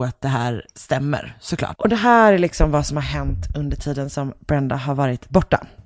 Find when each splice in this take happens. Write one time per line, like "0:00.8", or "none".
0:01.7